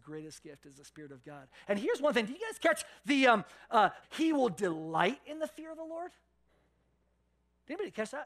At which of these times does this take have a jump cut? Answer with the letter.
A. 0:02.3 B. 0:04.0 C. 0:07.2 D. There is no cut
B